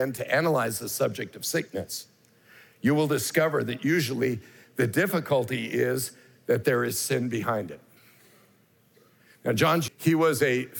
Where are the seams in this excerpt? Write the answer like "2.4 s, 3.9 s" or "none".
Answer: 9.9 s